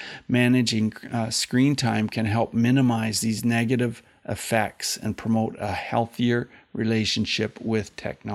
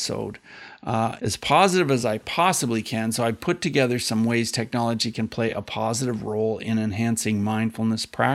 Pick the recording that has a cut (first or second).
second